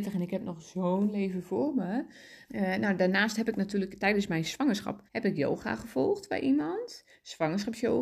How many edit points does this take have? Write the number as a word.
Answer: two